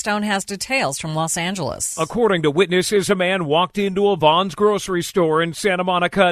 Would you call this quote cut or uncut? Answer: uncut